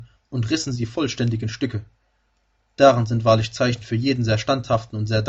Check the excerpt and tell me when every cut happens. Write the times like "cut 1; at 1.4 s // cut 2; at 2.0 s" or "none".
none